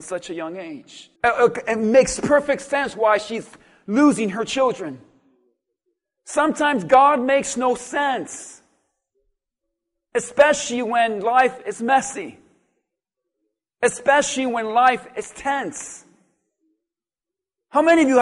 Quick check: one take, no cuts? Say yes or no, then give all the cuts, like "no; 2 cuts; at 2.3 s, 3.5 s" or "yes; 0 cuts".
no; 1 cut; at 1.2 s